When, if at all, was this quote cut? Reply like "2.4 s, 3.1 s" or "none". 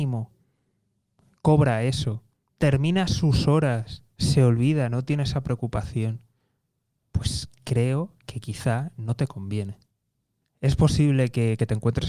7.0 s, 10.4 s